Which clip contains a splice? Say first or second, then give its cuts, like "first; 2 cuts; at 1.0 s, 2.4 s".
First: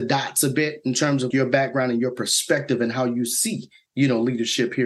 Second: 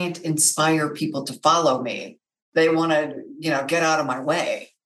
first; 1 cut; at 1.3 s